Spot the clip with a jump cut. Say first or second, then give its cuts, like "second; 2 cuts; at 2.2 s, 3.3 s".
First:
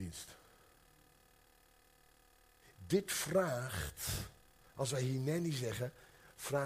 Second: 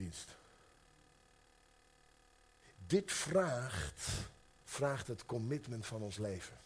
second; 1 cut; at 4.6 s